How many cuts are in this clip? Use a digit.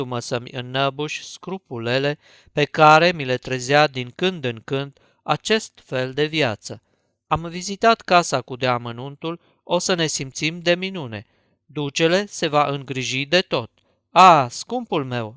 0